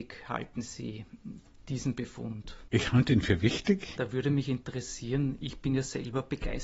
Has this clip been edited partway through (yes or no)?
yes